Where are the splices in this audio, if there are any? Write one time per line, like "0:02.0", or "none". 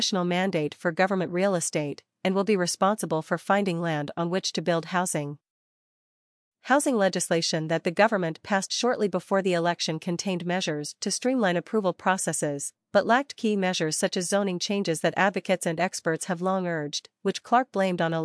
0:06.5